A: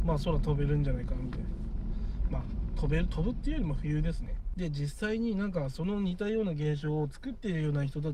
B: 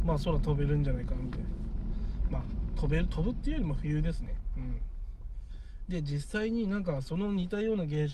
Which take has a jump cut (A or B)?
A